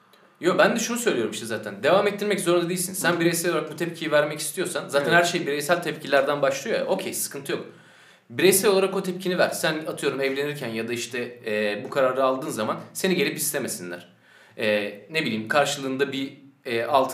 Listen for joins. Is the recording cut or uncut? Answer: uncut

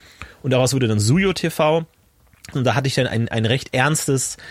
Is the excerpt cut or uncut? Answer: cut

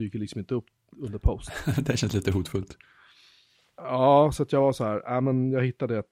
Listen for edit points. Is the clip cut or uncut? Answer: uncut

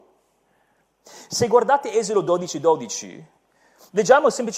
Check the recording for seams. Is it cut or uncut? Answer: cut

